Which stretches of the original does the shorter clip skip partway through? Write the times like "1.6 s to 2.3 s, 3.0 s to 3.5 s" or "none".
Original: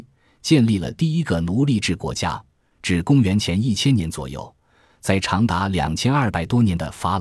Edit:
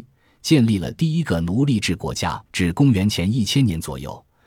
2.5 s to 2.8 s